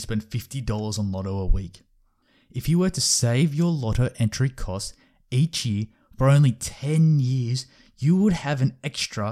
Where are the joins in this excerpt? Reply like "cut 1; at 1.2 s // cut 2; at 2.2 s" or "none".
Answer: none